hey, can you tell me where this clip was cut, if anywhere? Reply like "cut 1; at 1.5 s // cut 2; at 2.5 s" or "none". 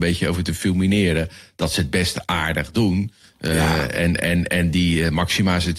none